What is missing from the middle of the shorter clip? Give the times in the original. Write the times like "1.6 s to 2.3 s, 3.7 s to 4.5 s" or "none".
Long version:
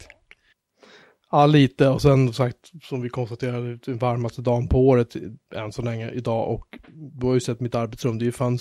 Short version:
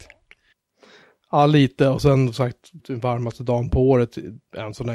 2.8 s to 3.8 s